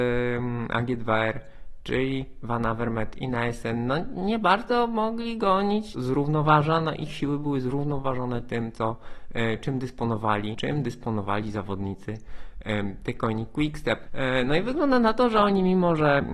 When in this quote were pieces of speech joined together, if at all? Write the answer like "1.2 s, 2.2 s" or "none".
5.9 s, 10.5 s, 14.1 s